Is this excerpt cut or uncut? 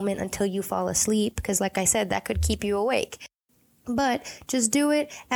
uncut